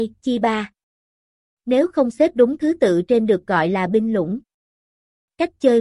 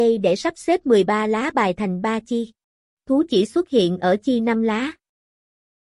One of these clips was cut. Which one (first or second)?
second